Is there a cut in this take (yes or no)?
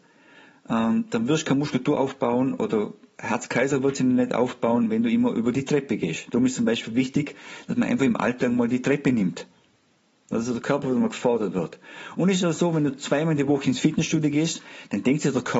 no